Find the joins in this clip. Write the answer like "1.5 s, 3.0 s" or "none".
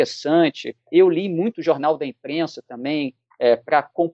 none